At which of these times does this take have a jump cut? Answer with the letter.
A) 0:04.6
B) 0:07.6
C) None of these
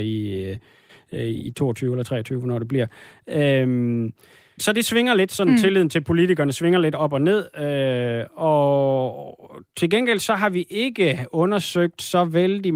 A